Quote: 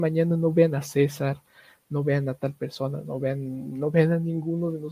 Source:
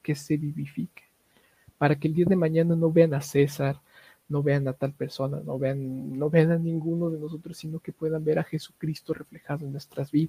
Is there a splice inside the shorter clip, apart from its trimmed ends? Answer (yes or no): no